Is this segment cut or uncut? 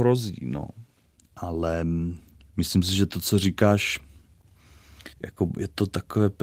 cut